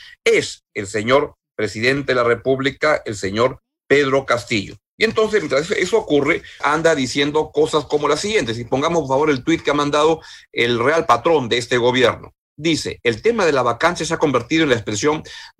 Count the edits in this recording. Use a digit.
1